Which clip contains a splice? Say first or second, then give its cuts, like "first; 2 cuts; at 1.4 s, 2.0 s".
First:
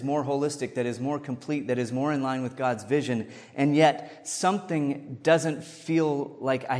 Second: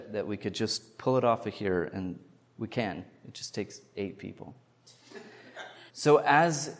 second; 1 cut; at 5.9 s